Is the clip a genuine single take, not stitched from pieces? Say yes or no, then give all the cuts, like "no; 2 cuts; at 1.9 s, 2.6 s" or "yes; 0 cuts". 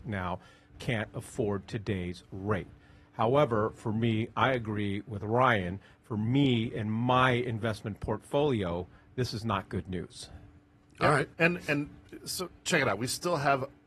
no; 1 cut; at 11.3 s